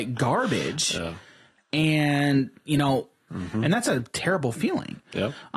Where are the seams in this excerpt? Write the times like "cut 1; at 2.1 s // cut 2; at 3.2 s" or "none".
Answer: cut 1; at 3.3 s